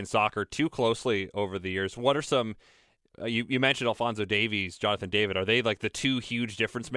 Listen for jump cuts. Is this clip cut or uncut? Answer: uncut